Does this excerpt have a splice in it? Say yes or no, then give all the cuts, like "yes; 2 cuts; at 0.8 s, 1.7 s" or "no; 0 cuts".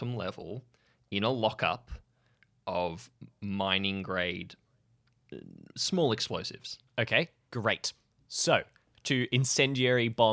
yes; 2 cuts; at 6.9 s, 8.9 s